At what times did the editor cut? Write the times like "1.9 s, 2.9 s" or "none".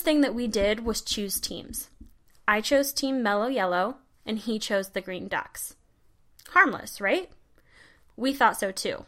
none